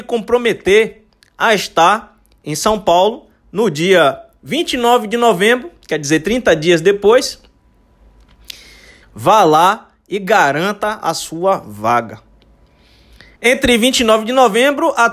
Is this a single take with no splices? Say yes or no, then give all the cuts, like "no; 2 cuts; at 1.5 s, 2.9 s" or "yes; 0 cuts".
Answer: no; 2 cuts; at 9.0 s, 13.4 s